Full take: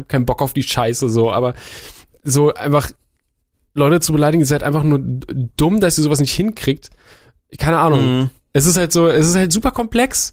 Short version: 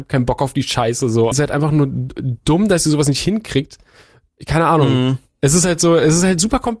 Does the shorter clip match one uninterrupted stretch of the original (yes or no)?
no